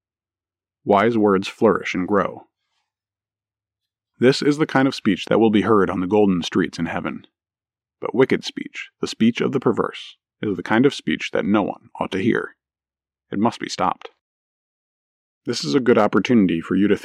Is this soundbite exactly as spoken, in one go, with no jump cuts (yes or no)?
yes